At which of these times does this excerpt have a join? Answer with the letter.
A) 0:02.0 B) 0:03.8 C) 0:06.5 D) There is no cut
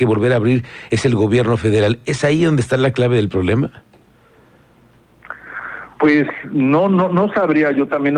D